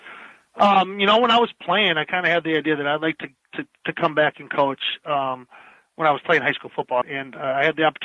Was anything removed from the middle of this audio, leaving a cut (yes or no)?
yes